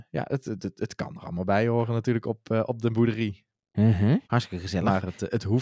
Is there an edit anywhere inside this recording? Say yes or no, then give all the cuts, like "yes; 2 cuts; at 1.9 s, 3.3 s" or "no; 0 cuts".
yes; 1 cut; at 4.2 s